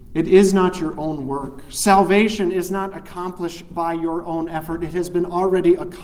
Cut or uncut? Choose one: uncut